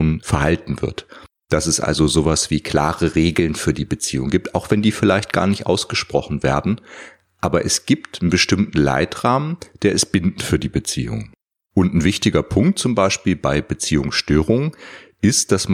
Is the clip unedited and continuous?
yes; 0 cuts

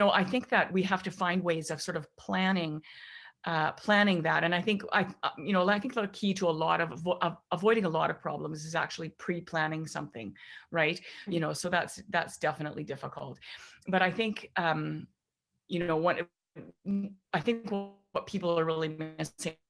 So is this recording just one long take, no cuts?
no; 2 cuts; at 11.3 s, 17.2 s

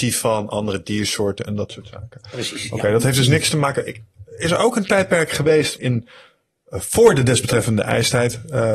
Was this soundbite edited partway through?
yes; 1 cut; at 5.8 s

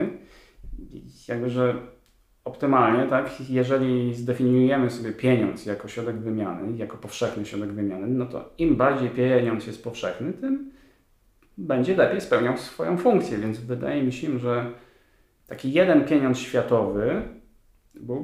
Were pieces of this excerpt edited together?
no; 0 cuts

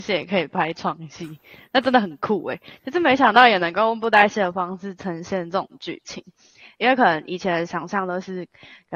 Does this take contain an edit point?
no; 0 cuts

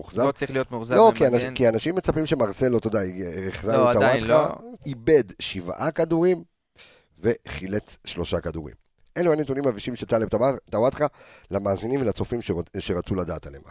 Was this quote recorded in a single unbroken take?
no; 1 cut; at 4.8 s

